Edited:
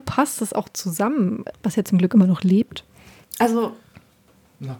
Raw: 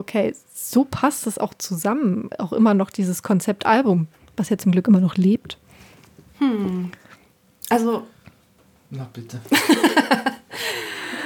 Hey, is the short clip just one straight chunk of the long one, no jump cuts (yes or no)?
no